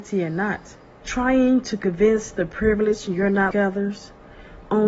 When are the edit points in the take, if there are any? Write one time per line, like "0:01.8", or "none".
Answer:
0:01.0
0:03.5